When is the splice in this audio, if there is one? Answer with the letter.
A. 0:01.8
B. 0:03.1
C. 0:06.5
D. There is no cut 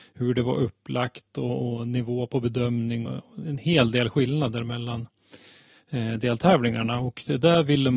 B